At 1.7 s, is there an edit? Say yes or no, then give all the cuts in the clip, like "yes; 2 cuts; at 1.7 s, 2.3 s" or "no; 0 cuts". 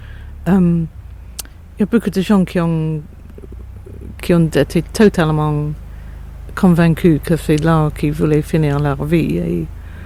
no; 1 cut; at 4.2 s